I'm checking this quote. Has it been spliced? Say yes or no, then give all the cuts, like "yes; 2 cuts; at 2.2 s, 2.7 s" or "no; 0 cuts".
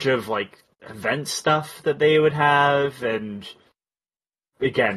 no; 0 cuts